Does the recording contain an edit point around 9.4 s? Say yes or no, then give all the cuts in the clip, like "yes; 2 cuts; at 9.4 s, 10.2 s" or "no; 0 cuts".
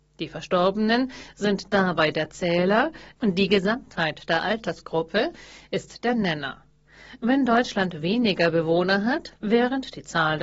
yes; 1 cut; at 9.4 s